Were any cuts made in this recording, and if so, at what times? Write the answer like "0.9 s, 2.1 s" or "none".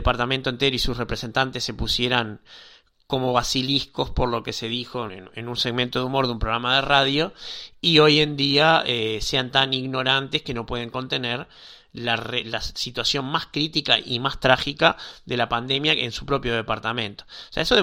5.1 s